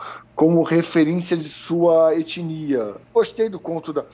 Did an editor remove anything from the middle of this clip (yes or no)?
yes